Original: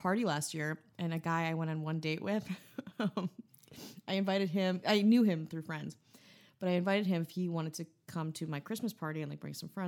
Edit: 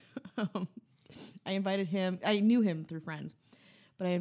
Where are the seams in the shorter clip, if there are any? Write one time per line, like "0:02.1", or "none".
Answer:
none